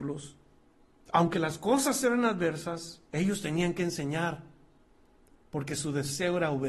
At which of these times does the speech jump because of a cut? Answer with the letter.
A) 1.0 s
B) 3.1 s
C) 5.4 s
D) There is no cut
B